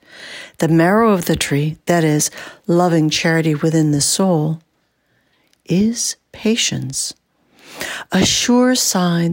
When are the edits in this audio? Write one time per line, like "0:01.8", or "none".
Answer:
none